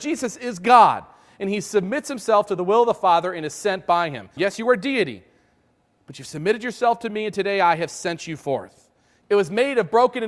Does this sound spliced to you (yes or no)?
yes